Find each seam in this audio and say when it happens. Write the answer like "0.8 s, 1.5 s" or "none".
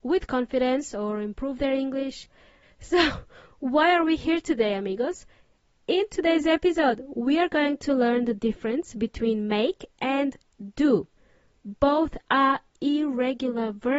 2.6 s